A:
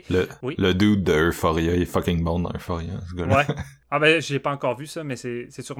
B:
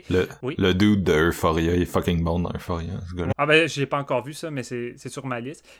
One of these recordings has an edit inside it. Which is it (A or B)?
B